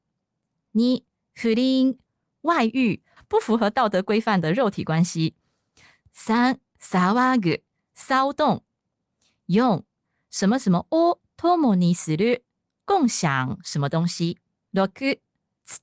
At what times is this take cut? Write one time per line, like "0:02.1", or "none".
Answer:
0:14.6

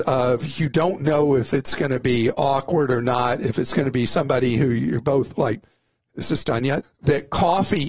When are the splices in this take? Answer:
0:06.8

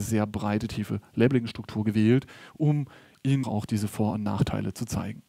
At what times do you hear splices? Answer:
0:03.4

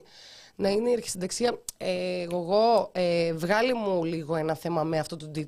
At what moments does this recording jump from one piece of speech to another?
none

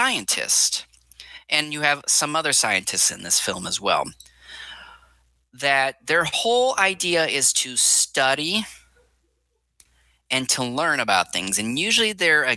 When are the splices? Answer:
none

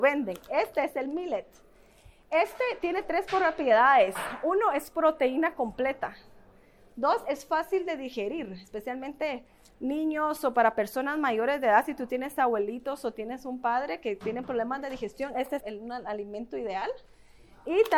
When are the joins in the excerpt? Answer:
0:15.6

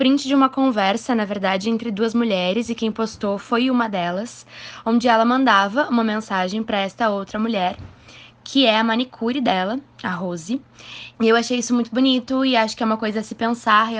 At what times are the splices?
0:11.1

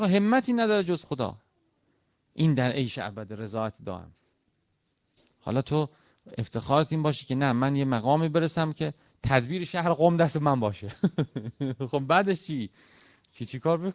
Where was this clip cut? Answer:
none

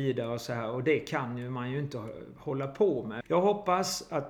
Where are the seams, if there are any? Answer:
0:03.2

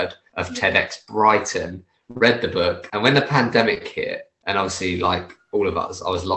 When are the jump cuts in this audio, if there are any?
0:02.9

